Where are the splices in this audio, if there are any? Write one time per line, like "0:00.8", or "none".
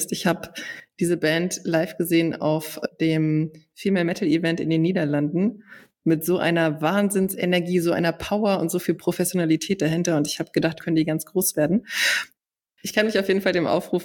0:10.8
0:12.4